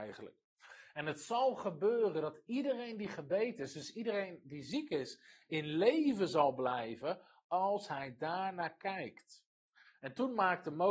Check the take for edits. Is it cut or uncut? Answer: uncut